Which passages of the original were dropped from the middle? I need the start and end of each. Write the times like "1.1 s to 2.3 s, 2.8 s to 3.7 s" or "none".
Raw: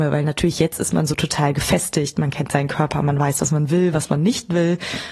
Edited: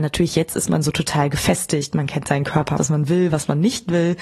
3.0 s to 3.4 s